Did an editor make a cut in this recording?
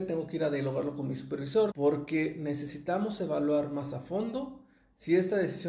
yes; 1 cut; at 1.7 s

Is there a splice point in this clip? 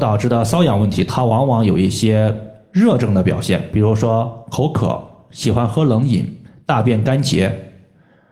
no; 0 cuts

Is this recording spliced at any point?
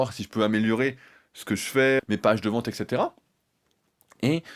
yes; 1 cut; at 2.0 s

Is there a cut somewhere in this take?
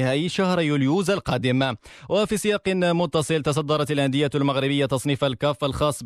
no; 0 cuts

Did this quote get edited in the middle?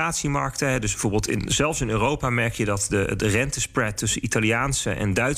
no; 0 cuts

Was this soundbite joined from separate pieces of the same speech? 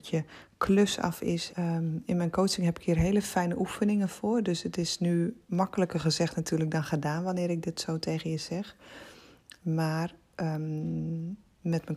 yes; 1 cut; at 1.5 s

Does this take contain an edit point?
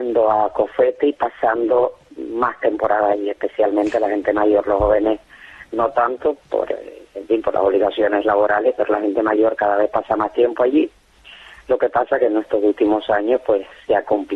no; 0 cuts

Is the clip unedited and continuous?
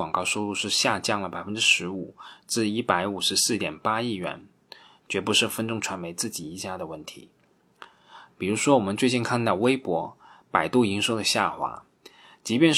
no; 2 cuts; at 5.0 s, 8.3 s

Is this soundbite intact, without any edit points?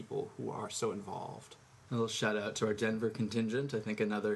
no; 1 cut; at 1.9 s

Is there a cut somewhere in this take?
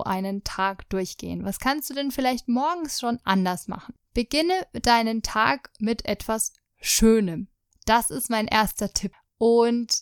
no; 0 cuts

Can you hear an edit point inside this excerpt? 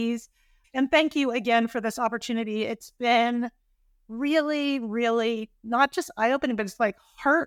no; 0 cuts

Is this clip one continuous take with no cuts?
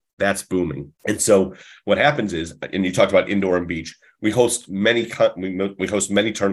no; 1 cut; at 1.0 s

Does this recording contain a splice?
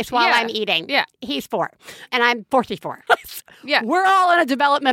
yes; 1 cut; at 3.1 s

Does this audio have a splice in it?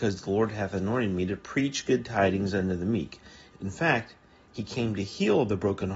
yes; 1 cut; at 3.5 s

